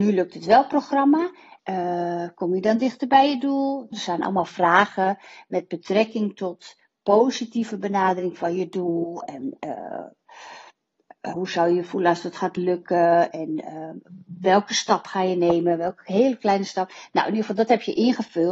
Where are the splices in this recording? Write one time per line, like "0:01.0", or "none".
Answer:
0:01.6
0:03.9
0:11.3